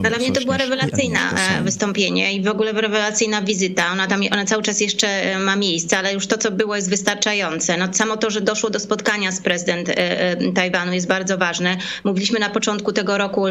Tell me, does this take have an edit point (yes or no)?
no